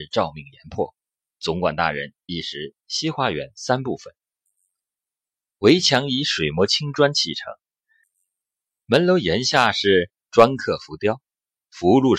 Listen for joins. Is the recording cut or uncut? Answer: cut